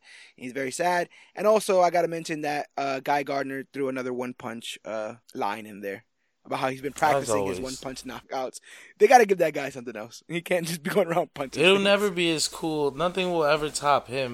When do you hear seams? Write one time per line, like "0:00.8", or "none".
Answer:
0:05.2